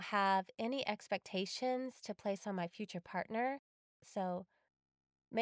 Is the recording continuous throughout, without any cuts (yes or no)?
no